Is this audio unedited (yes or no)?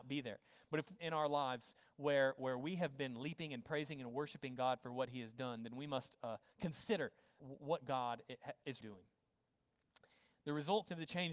no